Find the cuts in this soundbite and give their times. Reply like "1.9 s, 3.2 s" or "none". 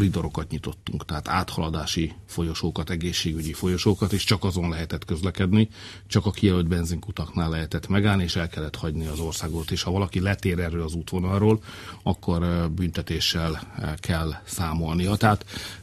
none

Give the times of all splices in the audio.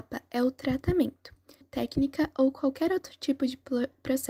1.6 s

